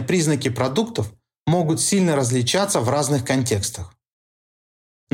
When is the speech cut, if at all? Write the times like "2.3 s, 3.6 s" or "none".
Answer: none